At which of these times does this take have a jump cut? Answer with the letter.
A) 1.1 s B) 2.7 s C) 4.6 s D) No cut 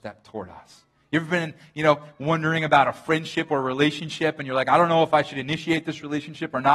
D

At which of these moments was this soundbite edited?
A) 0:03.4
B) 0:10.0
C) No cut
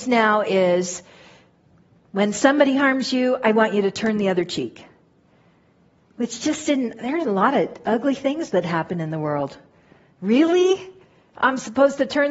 C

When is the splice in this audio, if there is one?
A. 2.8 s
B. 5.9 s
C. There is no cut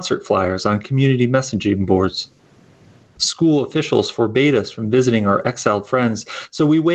C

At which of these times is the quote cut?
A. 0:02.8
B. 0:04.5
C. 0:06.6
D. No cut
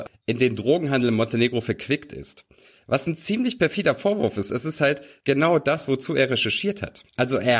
B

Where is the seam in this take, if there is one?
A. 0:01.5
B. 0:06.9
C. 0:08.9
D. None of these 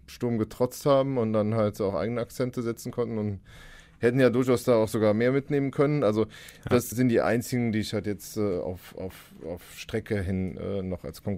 B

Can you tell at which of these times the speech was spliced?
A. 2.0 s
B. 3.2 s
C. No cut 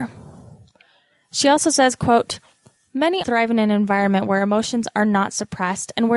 B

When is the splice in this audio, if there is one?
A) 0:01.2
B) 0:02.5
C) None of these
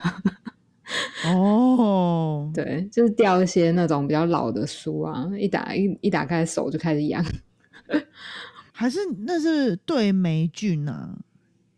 C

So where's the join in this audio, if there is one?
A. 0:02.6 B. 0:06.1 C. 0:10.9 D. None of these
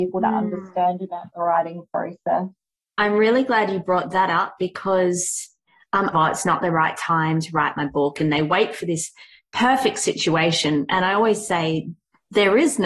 B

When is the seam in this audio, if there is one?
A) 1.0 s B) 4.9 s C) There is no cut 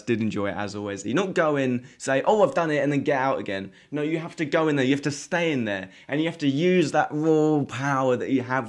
A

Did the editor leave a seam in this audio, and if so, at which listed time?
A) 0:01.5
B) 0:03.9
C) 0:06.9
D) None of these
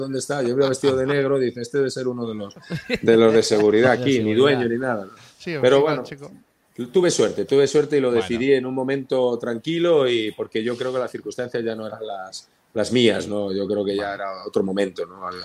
D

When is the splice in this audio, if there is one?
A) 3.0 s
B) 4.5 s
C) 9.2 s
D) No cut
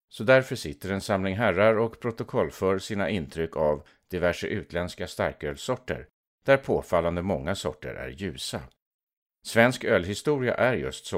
D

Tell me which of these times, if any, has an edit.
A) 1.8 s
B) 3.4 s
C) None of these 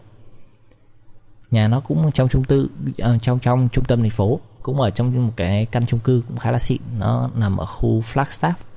B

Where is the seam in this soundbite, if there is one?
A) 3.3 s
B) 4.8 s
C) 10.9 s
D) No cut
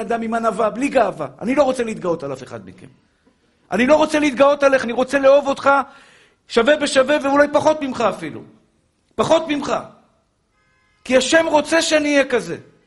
B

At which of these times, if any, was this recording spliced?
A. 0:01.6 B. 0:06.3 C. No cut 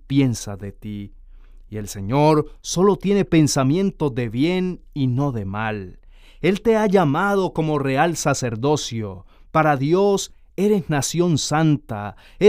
C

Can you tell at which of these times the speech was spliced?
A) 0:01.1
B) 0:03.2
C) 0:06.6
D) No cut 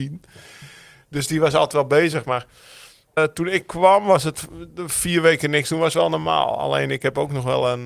B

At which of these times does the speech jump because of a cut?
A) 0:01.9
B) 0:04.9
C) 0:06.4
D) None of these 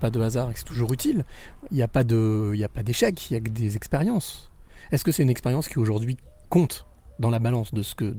C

